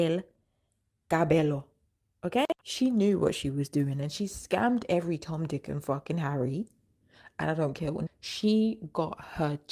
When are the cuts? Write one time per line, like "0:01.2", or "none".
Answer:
0:02.6
0:08.1

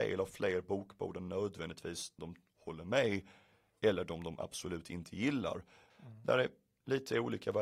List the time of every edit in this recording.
0:02.2
0:05.9

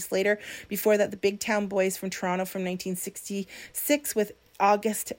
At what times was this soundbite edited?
none

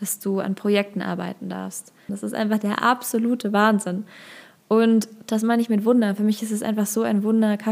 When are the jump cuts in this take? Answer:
0:02.1

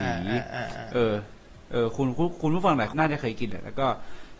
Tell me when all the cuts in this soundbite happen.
0:02.9

